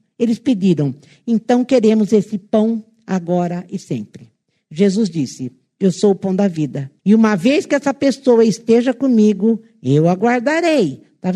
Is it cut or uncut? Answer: cut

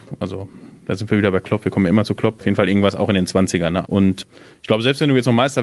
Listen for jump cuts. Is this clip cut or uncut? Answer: cut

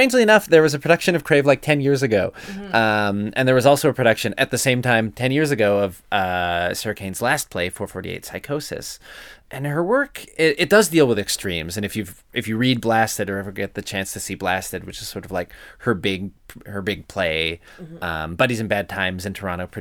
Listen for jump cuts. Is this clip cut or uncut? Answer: cut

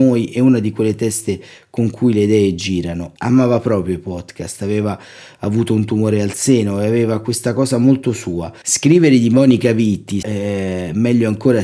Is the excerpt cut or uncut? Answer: cut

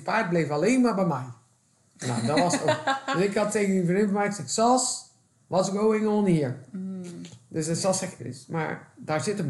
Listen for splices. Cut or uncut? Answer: cut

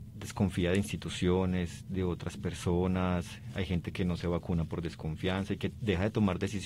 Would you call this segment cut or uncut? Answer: uncut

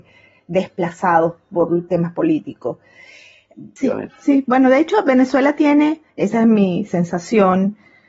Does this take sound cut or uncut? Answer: cut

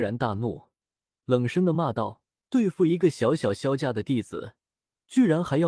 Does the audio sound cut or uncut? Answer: cut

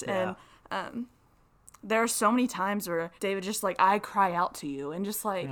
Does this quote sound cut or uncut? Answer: cut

